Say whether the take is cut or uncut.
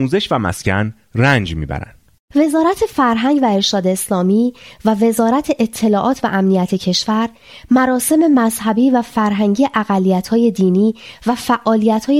uncut